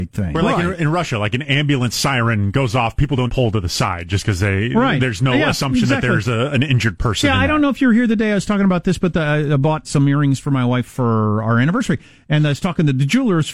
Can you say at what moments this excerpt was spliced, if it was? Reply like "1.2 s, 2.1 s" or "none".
3.3 s, 9.8 s